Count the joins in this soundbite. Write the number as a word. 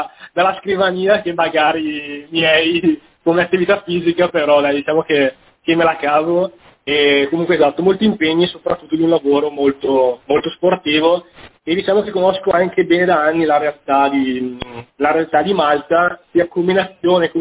zero